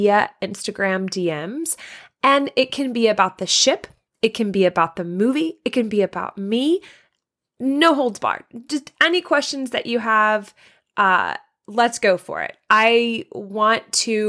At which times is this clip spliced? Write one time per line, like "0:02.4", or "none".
none